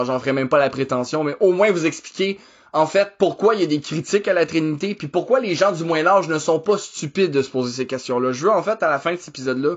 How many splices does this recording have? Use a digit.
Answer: 0